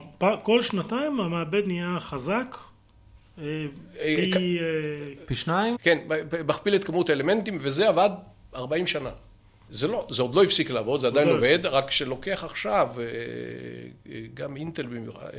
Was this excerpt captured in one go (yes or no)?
no